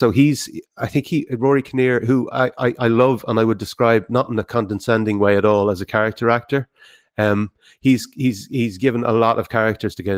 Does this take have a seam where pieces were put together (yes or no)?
no